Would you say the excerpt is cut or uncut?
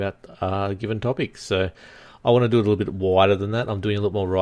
uncut